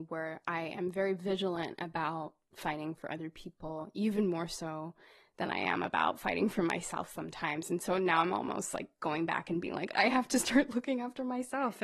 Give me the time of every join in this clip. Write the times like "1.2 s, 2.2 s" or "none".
9.9 s